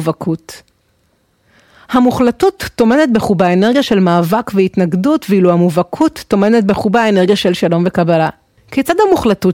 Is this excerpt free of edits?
no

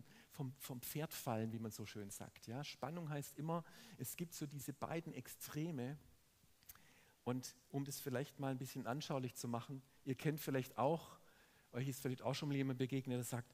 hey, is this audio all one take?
yes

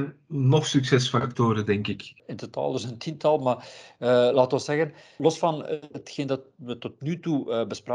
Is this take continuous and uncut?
yes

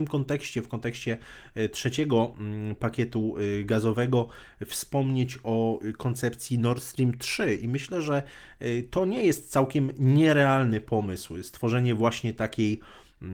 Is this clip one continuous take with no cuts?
yes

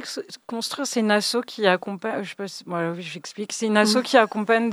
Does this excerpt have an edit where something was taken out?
no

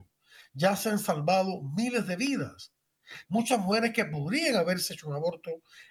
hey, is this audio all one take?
no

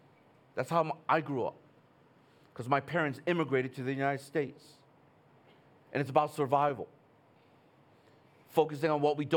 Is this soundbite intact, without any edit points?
yes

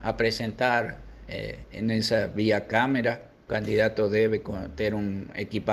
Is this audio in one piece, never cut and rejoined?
no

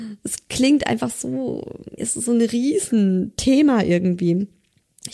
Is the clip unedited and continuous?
no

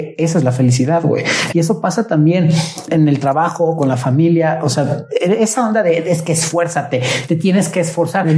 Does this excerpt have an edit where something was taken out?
yes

